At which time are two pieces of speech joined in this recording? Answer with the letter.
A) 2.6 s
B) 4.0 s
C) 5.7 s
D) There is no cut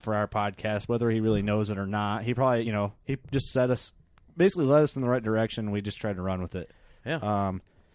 D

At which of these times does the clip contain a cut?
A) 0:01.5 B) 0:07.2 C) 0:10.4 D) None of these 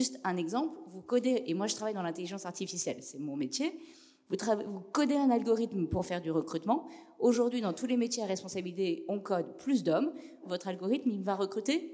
C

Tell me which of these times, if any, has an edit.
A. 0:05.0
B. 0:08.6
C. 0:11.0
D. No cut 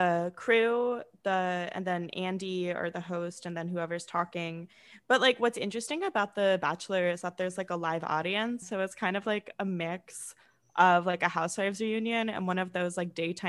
B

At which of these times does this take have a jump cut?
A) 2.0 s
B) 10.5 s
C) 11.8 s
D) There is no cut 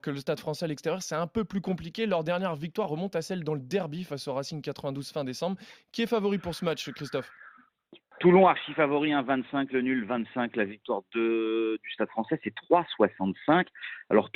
D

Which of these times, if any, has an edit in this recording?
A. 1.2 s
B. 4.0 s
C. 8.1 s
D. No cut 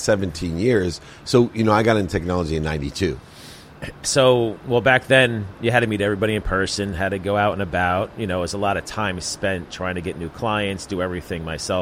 B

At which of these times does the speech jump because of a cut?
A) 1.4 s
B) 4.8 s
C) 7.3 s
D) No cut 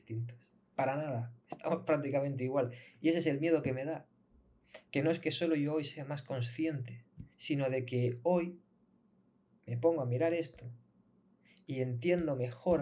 C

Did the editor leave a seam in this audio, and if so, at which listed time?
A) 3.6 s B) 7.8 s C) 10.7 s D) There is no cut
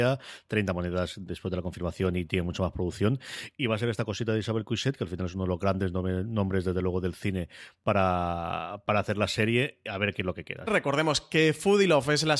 C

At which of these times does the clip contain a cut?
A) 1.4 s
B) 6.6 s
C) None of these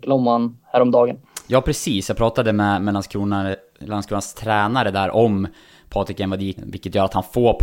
B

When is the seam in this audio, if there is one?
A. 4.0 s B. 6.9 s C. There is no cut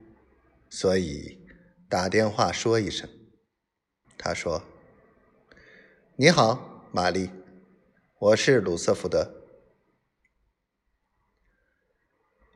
A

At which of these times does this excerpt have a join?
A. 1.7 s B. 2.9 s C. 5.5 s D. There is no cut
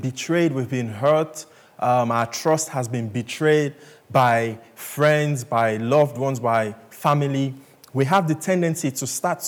D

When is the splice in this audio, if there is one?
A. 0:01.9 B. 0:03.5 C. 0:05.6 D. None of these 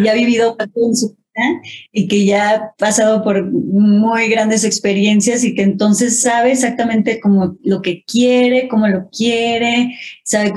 D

